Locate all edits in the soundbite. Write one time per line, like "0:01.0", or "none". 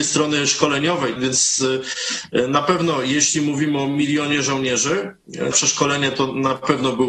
0:01.2
0:05.5